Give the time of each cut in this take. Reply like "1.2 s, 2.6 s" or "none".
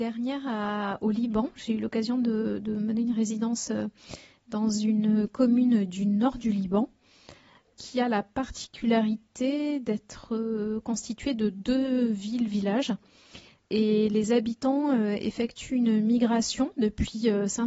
none